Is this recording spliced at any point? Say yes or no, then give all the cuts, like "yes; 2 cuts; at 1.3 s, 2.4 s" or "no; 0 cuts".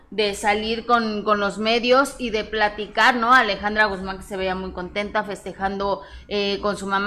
no; 0 cuts